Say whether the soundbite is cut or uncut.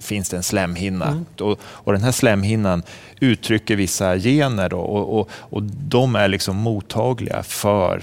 cut